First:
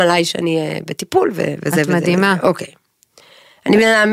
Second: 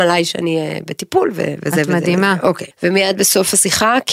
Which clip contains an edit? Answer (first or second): second